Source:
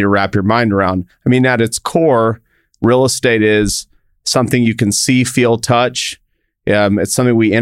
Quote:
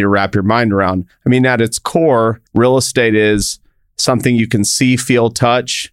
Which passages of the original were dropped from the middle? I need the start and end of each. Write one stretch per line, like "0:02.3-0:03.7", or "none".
0:02.5-0:02.7